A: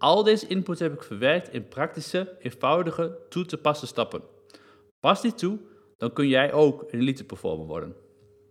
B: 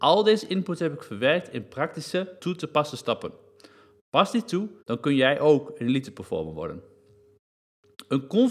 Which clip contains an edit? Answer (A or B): B